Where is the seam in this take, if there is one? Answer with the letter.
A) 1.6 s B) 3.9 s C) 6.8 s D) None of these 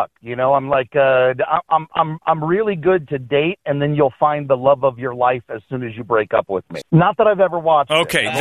C